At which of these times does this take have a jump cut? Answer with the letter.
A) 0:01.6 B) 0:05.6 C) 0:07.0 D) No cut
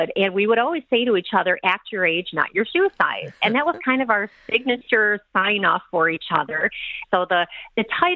C